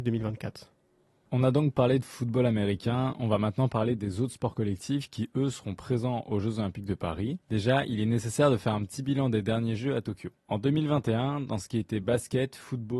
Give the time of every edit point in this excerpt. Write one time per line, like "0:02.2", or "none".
none